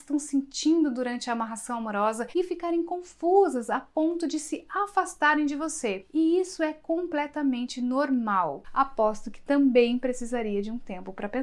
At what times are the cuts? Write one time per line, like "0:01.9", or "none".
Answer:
0:08.6